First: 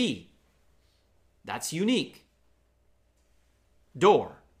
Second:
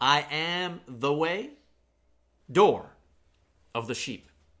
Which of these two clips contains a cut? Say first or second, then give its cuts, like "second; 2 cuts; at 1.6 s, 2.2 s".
second; 1 cut; at 2.4 s